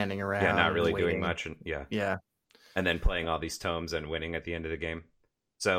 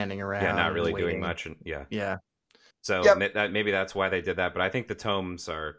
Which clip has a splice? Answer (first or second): second